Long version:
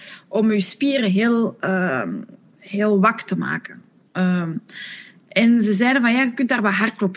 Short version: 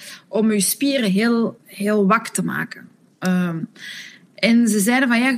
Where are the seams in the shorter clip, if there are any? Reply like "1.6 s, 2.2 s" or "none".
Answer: 1.6 s